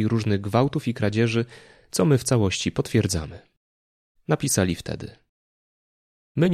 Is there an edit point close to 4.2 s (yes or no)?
yes